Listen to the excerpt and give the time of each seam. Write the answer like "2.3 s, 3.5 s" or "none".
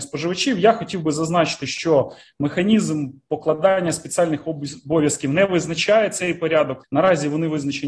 6.8 s